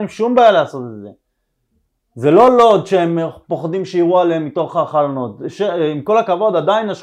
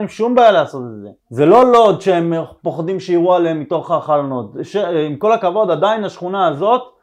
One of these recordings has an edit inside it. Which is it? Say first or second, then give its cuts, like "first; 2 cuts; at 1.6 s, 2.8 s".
second; 1 cut; at 1.2 s